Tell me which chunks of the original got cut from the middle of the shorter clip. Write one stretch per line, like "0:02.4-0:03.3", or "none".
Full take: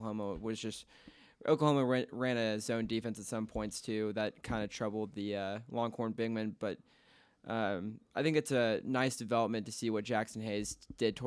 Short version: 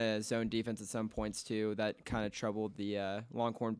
none